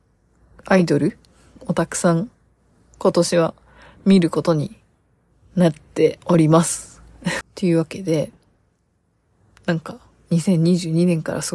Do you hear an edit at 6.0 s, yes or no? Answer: no